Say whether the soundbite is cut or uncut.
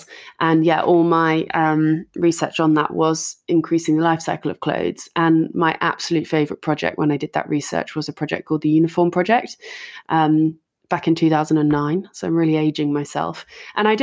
uncut